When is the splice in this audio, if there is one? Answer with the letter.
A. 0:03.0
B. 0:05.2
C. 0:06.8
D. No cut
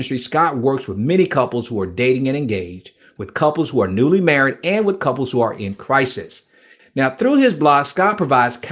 C